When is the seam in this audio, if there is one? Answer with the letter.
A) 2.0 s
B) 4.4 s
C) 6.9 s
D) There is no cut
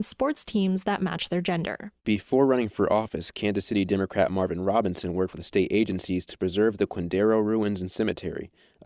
A